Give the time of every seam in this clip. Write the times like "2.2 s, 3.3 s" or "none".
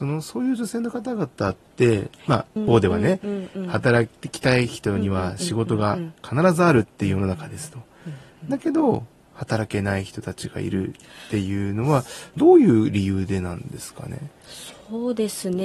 2.6 s, 12.4 s